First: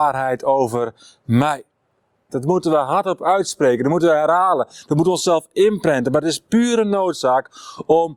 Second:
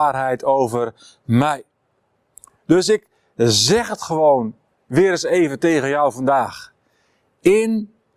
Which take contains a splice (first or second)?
first